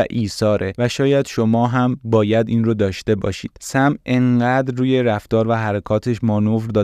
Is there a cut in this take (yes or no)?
yes